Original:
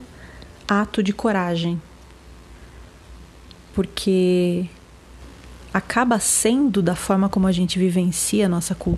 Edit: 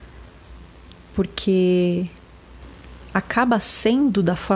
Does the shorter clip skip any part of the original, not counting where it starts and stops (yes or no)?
no